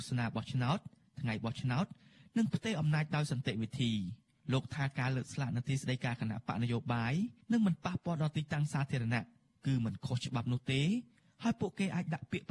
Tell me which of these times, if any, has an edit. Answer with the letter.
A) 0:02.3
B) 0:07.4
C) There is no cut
B